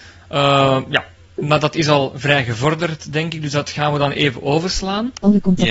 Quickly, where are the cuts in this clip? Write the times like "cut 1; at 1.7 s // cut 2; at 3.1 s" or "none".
none

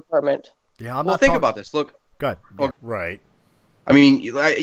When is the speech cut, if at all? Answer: cut 1; at 2.7 s

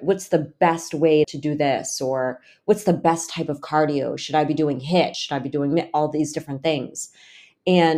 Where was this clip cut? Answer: cut 1; at 1.2 s // cut 2; at 5.1 s

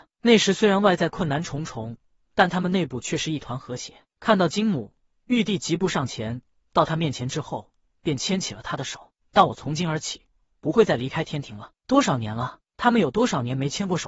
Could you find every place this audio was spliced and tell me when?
cut 1; at 4.1 s // cut 2; at 9.2 s // cut 3; at 11.8 s

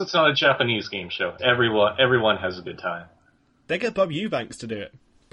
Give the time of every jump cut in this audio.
cut 1; at 1.4 s

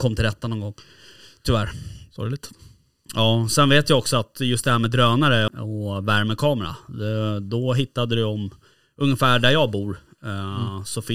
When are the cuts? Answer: cut 1; at 5.5 s

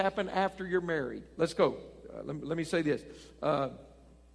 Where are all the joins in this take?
cut 1; at 1.4 s

